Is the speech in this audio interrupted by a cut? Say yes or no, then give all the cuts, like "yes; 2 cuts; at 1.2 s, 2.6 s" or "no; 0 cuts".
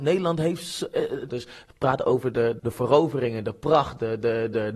yes; 2 cuts; at 1.3 s, 2.6 s